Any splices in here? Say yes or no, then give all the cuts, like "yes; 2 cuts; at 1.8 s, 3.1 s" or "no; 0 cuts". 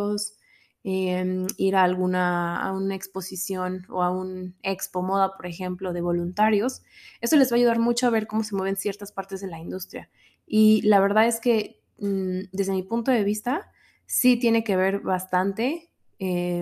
no; 0 cuts